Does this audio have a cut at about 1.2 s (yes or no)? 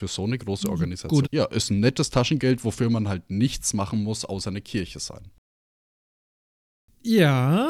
yes